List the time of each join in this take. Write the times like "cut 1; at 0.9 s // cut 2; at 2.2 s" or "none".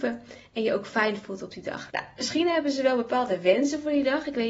cut 1; at 1.9 s